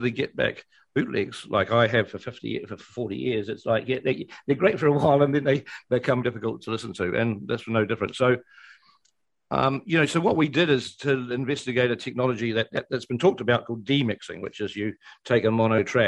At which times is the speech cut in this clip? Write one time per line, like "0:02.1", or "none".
0:06.2